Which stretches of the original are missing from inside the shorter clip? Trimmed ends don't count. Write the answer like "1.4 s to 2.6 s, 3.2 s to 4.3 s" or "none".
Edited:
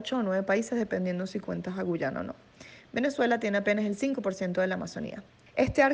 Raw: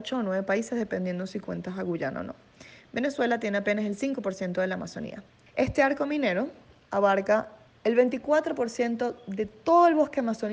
none